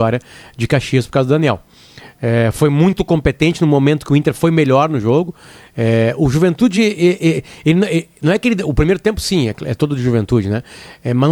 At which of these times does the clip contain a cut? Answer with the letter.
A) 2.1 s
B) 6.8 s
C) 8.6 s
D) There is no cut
D